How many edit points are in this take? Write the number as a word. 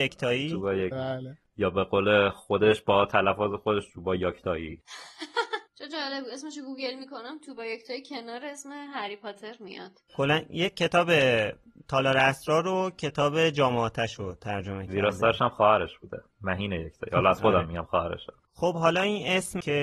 two